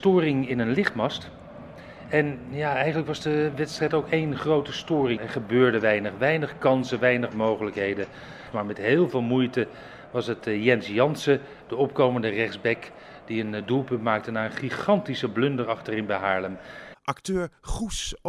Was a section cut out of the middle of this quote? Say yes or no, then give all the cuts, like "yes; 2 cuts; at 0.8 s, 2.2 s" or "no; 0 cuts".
yes; 3 cuts; at 5.2 s, 8.5 s, 16.9 s